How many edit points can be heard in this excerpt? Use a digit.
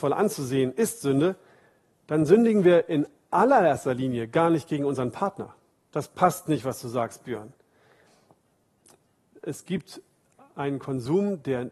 2